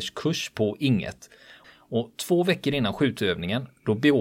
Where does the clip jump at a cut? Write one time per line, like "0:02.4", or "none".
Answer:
0:01.6